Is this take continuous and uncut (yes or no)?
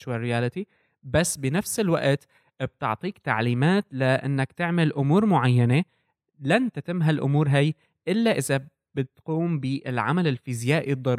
yes